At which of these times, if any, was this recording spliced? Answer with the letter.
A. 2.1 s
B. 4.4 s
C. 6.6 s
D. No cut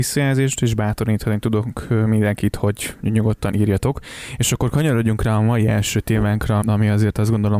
C